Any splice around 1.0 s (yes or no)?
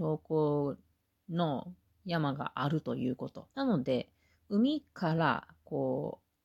no